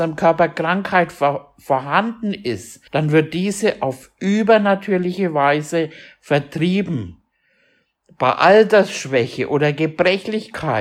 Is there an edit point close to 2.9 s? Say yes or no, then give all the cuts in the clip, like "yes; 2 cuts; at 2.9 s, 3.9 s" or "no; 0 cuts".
yes; 1 cut; at 2.9 s